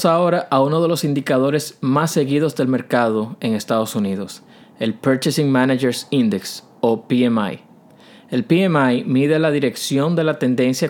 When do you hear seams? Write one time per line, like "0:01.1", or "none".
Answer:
none